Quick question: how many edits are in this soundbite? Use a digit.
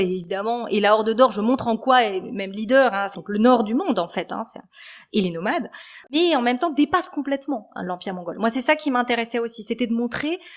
1